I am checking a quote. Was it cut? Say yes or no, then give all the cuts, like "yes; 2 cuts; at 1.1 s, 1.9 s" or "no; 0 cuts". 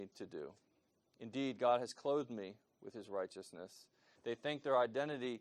yes; 1 cut; at 4.2 s